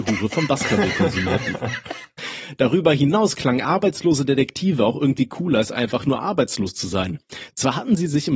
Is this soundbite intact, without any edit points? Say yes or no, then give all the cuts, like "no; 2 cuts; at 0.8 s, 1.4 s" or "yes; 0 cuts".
yes; 0 cuts